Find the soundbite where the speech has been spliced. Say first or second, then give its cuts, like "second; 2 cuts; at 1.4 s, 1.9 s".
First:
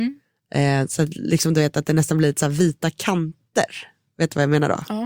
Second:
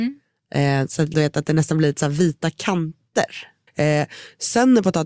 second; 2 cuts; at 1.1 s, 3.7 s